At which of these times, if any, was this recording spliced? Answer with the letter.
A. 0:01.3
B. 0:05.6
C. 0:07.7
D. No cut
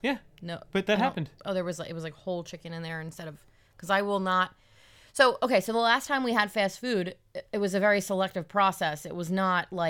D